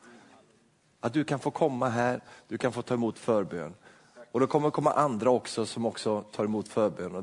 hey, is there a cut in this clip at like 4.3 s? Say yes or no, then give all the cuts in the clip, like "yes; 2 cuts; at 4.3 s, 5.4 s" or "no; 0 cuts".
no; 0 cuts